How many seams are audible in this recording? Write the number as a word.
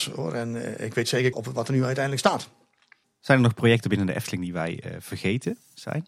two